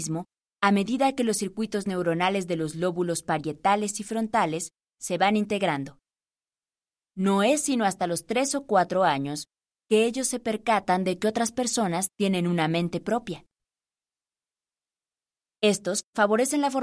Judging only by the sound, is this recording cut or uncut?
cut